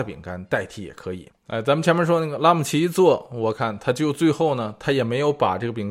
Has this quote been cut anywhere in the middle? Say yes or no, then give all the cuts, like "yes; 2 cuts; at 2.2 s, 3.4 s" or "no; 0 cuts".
yes; 1 cut; at 1.3 s